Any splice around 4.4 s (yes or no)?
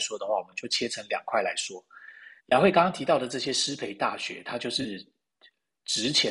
no